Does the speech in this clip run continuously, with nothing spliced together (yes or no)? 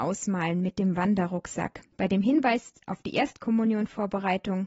no